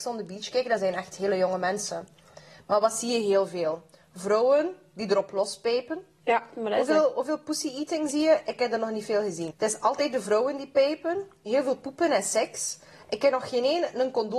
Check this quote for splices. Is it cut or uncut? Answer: cut